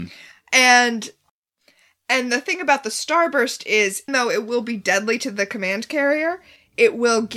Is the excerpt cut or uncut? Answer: cut